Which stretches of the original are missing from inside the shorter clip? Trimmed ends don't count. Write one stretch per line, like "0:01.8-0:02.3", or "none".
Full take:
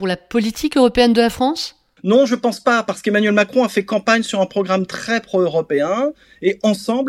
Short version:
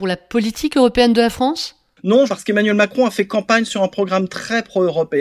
0:02.3-0:02.8